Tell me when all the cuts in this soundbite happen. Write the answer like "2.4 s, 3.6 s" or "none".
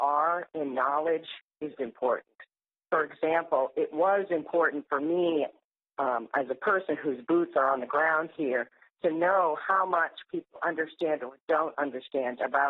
1.8 s

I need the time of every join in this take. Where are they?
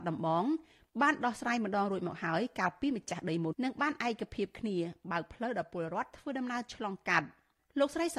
3.5 s

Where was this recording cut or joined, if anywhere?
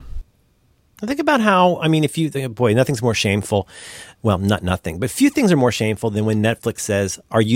none

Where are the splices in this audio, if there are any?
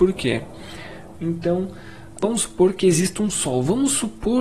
1.1 s, 2.1 s

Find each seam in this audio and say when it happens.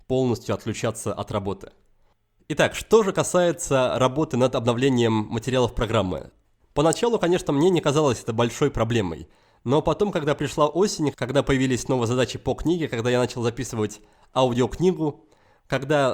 none

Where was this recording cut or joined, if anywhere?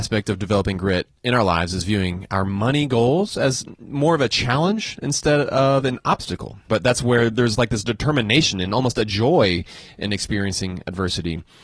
6.7 s

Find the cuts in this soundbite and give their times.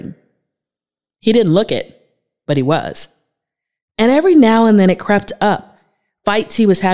none

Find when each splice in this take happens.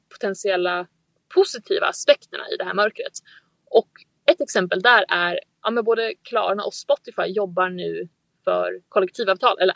none

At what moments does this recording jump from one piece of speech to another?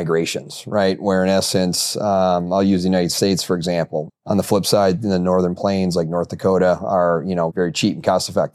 4.1 s, 7.5 s

